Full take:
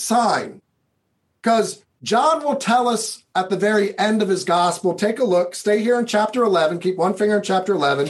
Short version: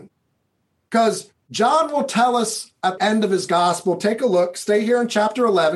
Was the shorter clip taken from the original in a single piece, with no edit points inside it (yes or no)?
no